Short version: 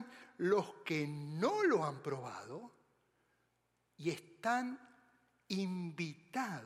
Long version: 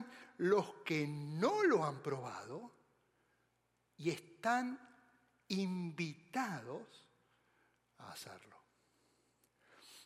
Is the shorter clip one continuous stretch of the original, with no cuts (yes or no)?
yes